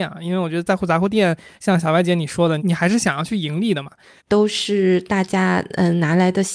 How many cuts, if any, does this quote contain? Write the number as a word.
two